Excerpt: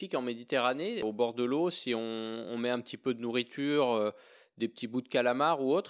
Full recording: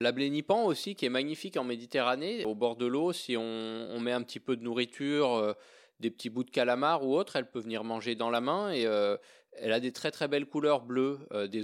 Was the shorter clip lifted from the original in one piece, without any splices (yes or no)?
yes